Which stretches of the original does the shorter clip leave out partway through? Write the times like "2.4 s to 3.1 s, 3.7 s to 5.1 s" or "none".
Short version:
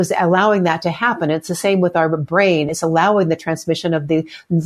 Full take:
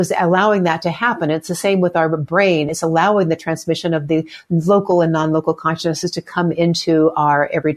none